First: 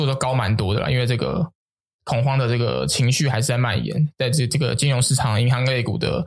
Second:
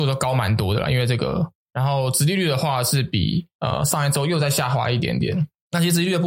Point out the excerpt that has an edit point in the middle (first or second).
second